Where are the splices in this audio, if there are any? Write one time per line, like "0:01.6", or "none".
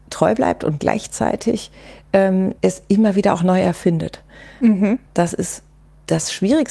0:05.1